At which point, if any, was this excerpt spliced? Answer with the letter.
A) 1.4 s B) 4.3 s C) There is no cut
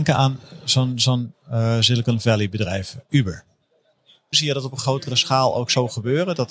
B